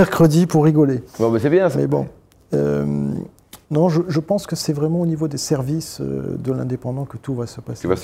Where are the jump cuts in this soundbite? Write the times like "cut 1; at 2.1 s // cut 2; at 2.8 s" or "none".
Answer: cut 1; at 1.7 s